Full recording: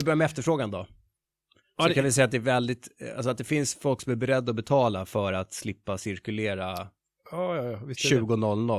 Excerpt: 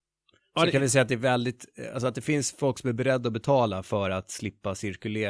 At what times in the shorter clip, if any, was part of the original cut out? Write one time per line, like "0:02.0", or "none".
none